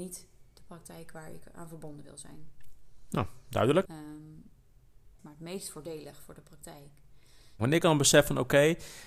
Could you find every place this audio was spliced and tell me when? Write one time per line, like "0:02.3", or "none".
0:03.9
0:05.2
0:07.6

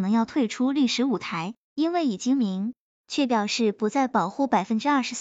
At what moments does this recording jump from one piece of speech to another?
none

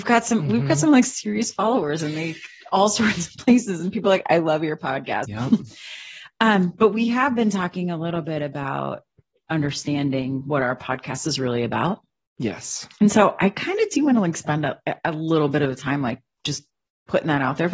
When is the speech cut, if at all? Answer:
0:05.2

